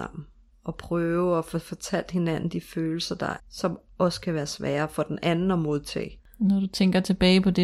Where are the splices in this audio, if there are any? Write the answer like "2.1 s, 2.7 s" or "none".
3.4 s, 6.2 s

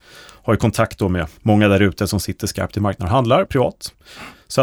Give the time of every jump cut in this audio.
1.4 s, 3.5 s

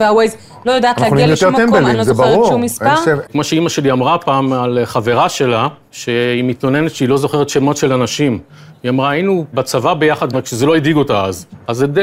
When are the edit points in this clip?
3.2 s, 10.3 s

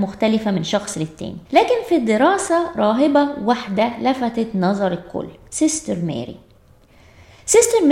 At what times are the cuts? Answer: 1.4 s

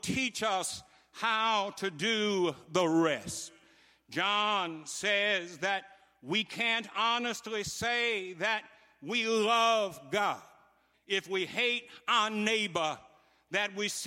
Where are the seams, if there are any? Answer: 10.9 s

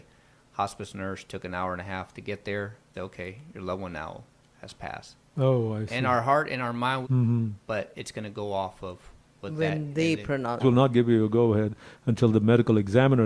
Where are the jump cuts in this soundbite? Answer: 2.9 s, 7.0 s, 10.6 s

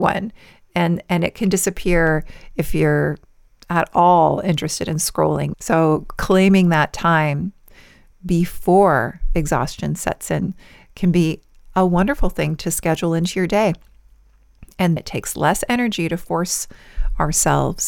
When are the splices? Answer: 5.5 s, 15.0 s

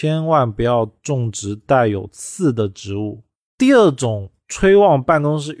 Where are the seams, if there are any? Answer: 3.5 s

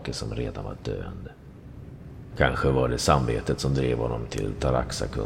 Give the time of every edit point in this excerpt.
2.3 s

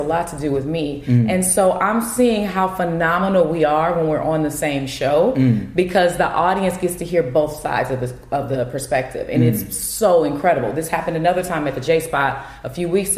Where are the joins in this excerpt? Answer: none

